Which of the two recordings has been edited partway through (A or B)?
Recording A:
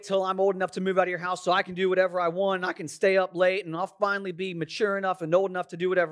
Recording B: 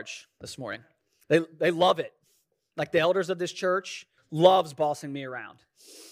B